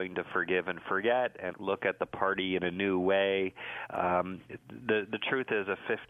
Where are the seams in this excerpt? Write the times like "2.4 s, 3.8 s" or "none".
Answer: 1.5 s